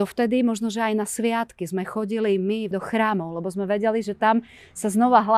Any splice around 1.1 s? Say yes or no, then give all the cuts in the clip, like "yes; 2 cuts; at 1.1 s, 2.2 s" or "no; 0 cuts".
no; 1 cut; at 2.7 s